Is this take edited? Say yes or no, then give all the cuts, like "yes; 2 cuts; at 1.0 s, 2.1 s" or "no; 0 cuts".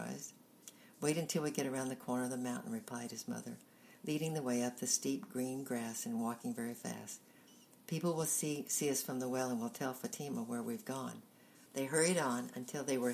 yes; 2 cuts; at 4.0 s, 11.7 s